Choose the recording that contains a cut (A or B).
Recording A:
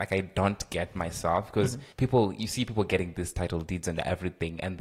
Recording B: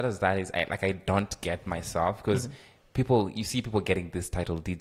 A